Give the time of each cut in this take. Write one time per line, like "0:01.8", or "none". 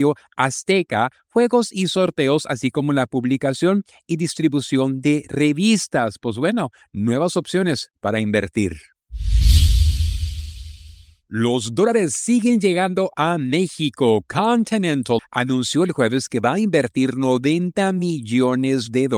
0:15.2